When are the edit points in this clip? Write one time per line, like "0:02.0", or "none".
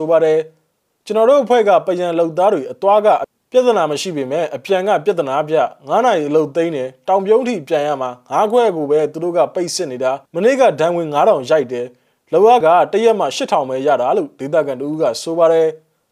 0:10.3
0:12.6